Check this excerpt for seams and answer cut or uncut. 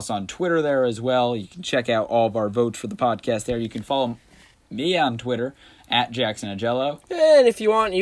uncut